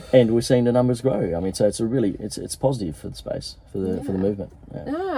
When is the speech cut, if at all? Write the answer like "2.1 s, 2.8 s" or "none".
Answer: none